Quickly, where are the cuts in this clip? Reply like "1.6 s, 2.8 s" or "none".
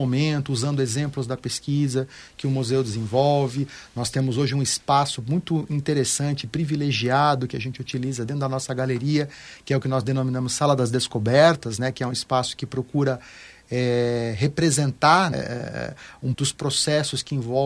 15.3 s, 16.3 s